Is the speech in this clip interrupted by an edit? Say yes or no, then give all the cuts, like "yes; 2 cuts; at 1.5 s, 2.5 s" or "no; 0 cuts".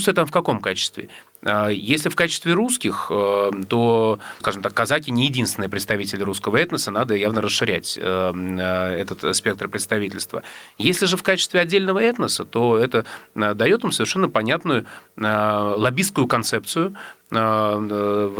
yes; 1 cut; at 4.4 s